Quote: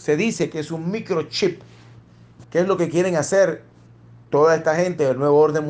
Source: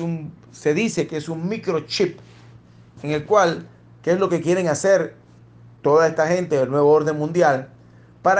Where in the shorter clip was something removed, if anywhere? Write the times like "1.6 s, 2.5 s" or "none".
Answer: 2.4 s